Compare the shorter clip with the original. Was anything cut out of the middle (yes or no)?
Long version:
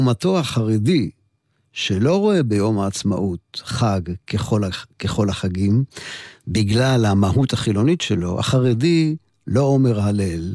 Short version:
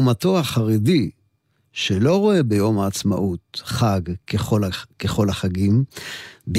no